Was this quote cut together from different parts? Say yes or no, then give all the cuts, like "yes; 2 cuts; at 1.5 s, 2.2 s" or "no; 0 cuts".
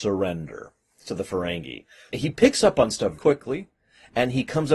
yes; 2 cuts; at 2.1 s, 3.2 s